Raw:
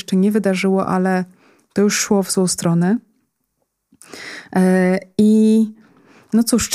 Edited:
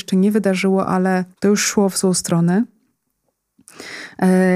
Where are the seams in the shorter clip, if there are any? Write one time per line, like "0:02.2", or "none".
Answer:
0:01.3